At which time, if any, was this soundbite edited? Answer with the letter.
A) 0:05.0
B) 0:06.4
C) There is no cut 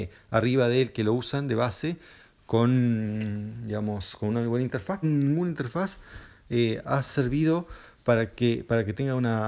A